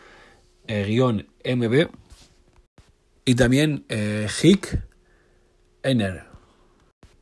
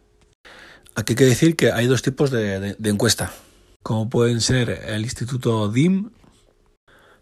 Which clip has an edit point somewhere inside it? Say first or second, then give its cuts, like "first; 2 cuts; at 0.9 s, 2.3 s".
second; 1 cut; at 3.8 s